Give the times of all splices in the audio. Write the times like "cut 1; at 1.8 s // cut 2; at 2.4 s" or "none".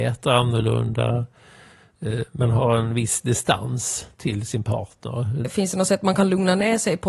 cut 1; at 4.1 s // cut 2; at 5.4 s